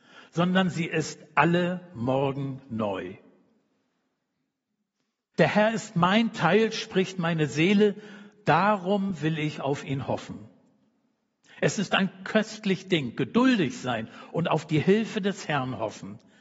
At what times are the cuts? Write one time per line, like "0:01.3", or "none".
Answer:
0:05.3